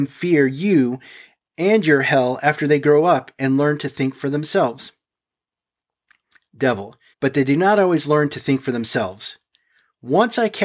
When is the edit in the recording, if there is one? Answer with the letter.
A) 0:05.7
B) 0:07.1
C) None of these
B